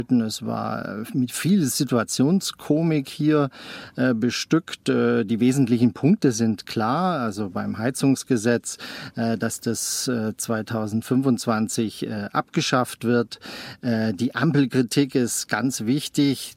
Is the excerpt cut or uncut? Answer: uncut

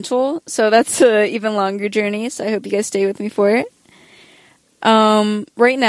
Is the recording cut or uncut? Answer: uncut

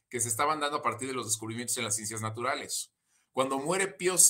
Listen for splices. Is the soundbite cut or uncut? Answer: cut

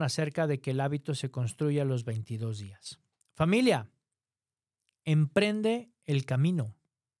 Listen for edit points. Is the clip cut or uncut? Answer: uncut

